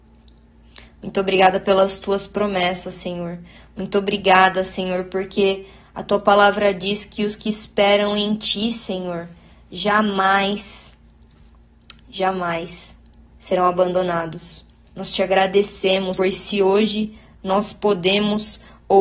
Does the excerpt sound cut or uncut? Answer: cut